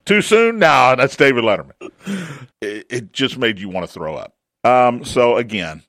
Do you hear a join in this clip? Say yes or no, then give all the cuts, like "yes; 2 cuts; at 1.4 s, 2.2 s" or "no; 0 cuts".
yes; 2 cuts; at 2.5 s, 4.5 s